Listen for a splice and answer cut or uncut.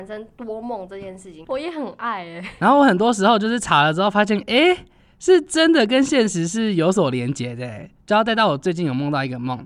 cut